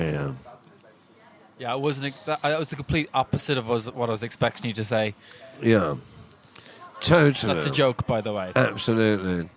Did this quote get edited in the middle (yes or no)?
no